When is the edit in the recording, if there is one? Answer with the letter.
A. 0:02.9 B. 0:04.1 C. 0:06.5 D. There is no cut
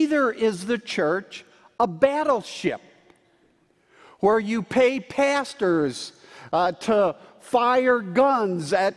D